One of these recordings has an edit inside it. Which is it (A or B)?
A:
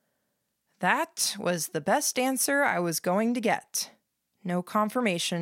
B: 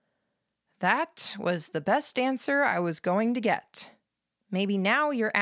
B